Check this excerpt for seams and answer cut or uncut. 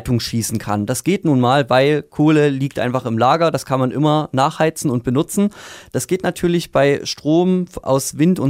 uncut